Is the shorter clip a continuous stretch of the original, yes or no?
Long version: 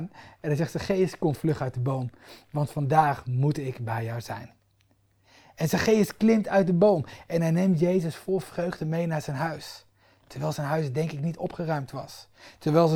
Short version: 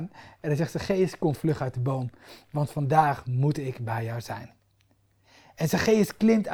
yes